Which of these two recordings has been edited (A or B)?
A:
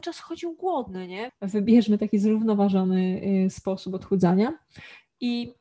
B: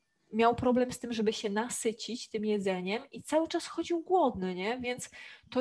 A